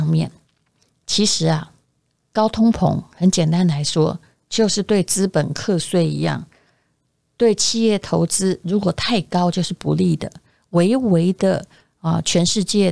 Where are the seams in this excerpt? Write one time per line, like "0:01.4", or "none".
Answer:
none